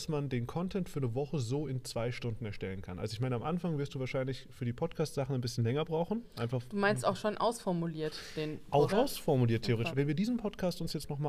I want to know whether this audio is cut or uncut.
cut